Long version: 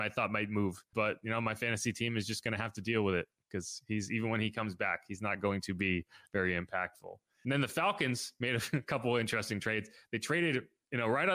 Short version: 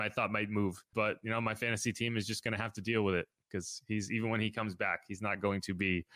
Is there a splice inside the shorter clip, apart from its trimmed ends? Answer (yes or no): no